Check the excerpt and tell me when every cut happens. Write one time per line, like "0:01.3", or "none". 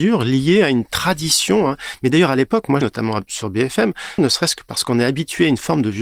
0:02.8
0:04.2